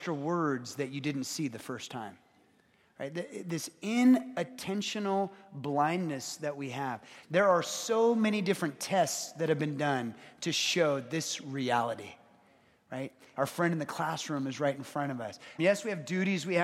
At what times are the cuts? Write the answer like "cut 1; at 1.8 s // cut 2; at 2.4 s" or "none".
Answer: cut 1; at 7.2 s // cut 2; at 13.3 s // cut 3; at 15.6 s